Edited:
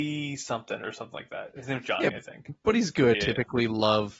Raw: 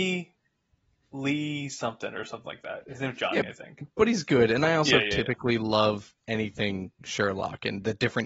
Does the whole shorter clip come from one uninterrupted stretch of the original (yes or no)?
no